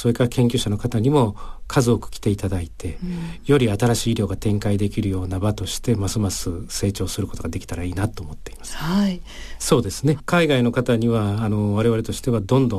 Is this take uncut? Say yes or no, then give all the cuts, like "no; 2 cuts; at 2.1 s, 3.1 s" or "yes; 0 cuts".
no; 1 cut; at 9.6 s